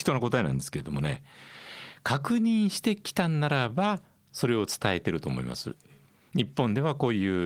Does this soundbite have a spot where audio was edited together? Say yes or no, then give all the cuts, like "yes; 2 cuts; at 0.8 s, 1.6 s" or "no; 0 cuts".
no; 0 cuts